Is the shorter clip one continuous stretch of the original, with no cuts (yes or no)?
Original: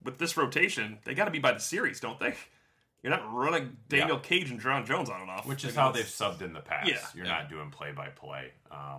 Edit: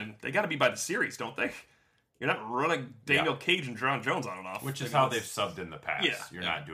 yes